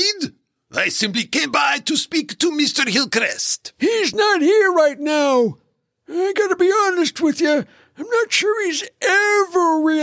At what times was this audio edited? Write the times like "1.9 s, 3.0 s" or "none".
none